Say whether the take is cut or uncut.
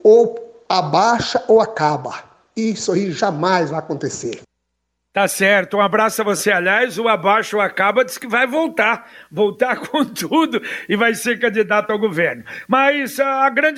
uncut